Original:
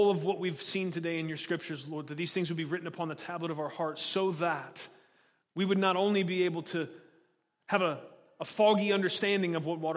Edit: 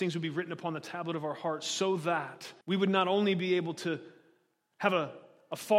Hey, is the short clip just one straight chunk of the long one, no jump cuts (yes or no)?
no